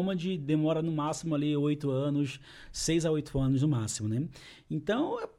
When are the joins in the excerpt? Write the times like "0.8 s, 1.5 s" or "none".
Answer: none